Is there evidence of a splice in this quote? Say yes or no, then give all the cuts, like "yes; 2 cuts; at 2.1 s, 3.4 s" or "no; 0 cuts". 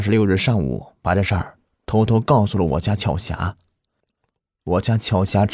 no; 0 cuts